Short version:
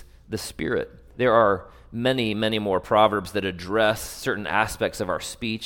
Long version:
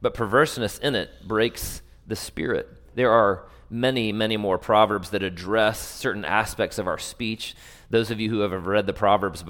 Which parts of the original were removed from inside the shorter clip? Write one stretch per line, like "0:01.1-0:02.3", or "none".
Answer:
none